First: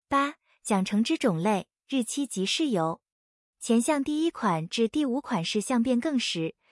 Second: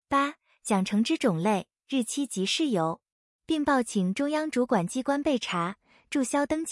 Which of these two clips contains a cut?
second; 1 cut; at 3.4 s

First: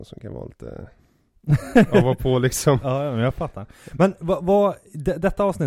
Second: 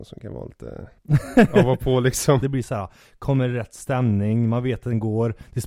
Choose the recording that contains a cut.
second; 2 cuts; at 1.0 s, 2.4 s

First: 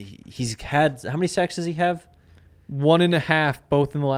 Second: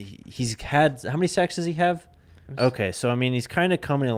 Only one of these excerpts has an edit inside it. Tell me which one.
second; 1 cut; at 2.5 s

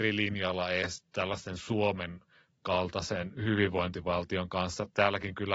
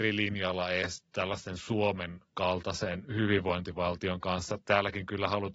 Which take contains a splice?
second; 1 cut; at 2.3 s

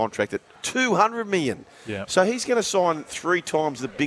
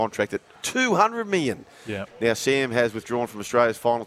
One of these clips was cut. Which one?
second; 1 cut; at 2.1 s

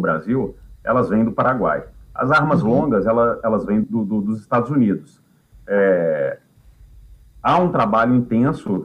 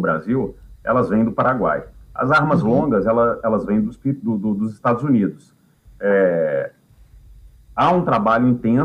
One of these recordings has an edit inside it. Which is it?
first; 1 cut; at 3.8 s

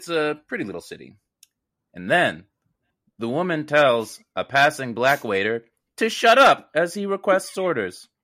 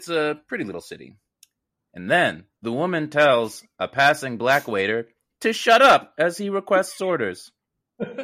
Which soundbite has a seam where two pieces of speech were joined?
second; 1 cut; at 2.5 s

